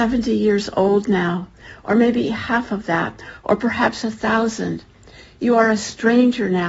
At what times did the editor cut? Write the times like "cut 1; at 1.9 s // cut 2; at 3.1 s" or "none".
none

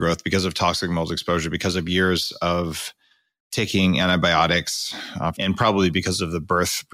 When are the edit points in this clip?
cut 1; at 5.3 s

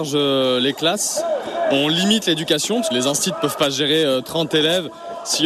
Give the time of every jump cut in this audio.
cut 1; at 2.9 s

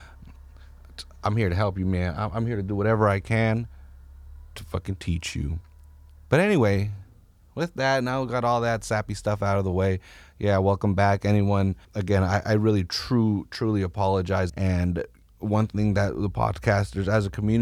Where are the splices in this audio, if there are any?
cut 1; at 11.8 s // cut 2; at 14.5 s

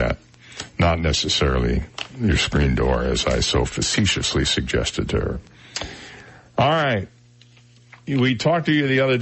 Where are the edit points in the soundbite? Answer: none

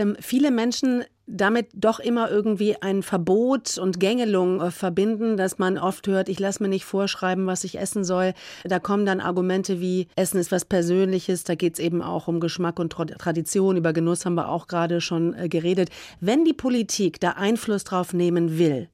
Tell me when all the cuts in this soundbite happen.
cut 1; at 10.1 s

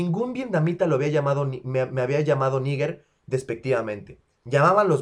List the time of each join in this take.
none

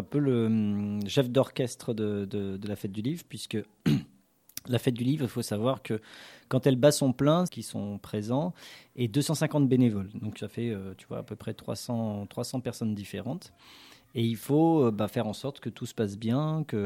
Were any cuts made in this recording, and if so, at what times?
cut 1; at 7.5 s

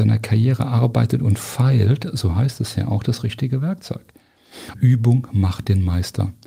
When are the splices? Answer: cut 1; at 4.7 s

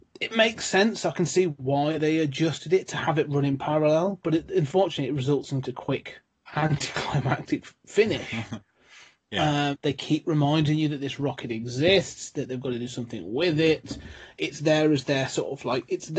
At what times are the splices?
cut 1; at 5.6 s // cut 2; at 9.7 s

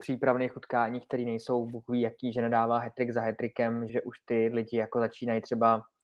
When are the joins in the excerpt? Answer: cut 1; at 3.9 s

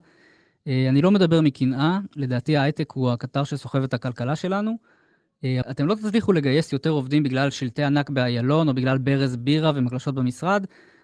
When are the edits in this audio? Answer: cut 1; at 5.6 s

